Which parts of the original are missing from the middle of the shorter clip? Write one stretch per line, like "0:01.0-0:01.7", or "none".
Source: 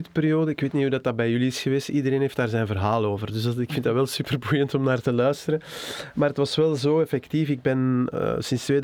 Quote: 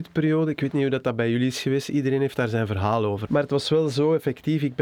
0:03.3-0:06.1